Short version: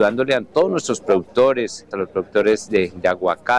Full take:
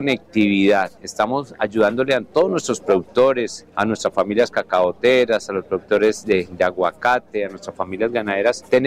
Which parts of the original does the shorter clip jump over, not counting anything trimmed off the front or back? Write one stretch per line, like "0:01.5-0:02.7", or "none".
0:03.7-0:05.5